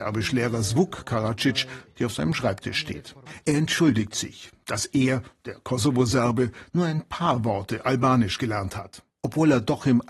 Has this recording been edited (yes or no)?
no